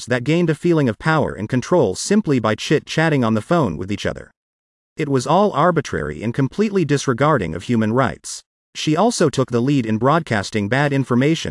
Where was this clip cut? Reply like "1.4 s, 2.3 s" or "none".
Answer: none